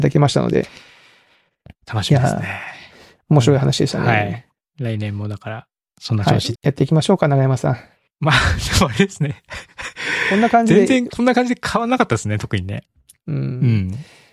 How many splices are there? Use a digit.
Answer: 1